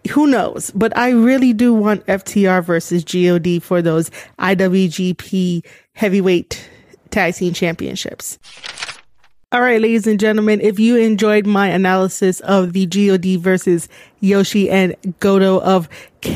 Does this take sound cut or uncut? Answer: uncut